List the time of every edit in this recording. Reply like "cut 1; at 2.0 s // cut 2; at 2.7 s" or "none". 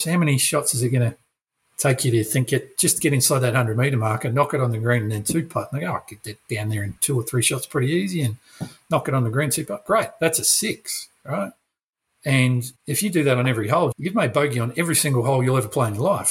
cut 1; at 12.8 s // cut 2; at 13.9 s